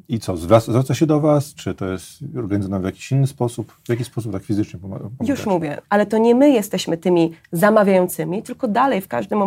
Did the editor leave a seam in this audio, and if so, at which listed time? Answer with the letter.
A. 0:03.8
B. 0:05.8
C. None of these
B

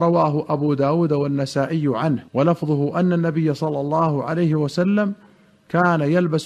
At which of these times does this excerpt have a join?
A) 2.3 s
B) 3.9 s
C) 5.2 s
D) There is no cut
A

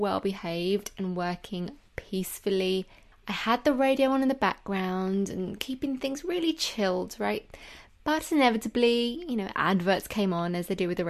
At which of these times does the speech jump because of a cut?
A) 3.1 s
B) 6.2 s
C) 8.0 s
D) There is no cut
A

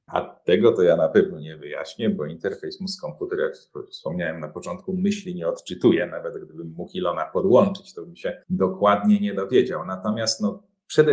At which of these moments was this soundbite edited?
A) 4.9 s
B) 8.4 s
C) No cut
B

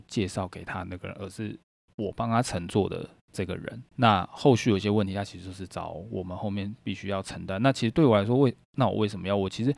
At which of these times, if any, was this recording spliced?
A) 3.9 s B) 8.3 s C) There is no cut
A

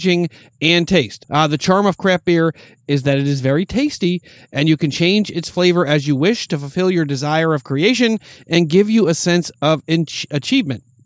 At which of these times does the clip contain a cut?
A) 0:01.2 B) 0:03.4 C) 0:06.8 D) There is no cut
A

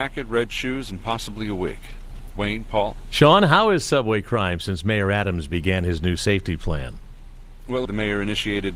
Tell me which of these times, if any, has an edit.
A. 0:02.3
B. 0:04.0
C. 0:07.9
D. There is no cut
C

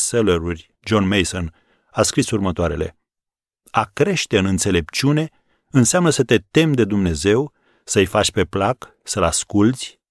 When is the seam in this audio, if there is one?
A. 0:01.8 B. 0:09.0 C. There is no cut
C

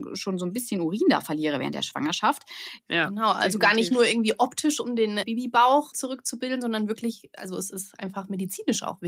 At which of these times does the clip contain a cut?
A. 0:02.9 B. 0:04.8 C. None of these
A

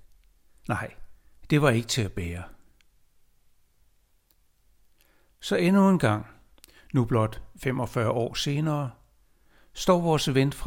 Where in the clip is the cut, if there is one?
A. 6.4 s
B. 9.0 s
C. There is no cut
C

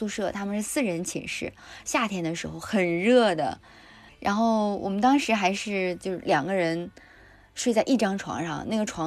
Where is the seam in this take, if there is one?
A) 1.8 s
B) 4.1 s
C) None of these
B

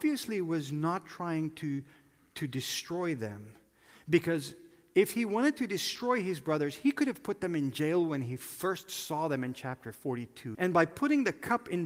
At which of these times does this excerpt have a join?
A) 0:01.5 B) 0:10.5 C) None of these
B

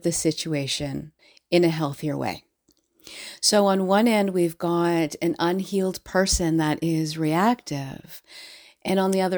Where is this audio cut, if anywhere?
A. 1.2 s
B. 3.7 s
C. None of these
C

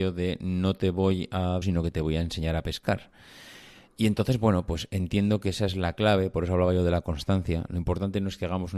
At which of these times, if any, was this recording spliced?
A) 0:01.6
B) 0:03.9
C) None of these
A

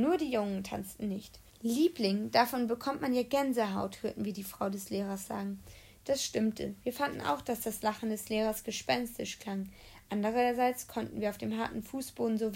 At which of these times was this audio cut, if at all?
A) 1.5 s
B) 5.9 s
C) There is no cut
A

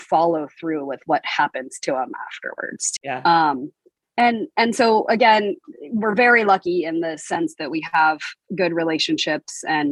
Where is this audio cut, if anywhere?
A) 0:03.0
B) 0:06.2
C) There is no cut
A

